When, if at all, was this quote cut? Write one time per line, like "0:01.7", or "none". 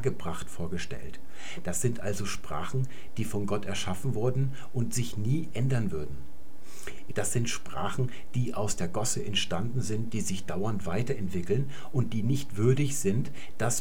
0:07.1